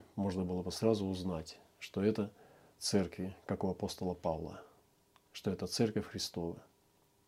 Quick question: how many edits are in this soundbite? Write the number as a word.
zero